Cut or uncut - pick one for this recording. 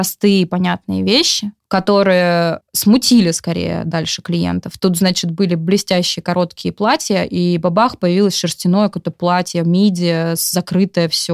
cut